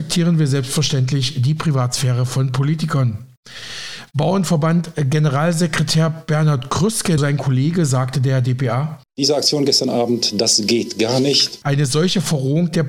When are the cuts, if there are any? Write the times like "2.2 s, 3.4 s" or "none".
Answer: 7.2 s, 11.6 s